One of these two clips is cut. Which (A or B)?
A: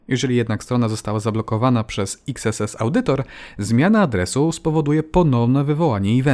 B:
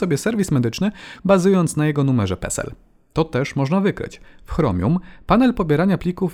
B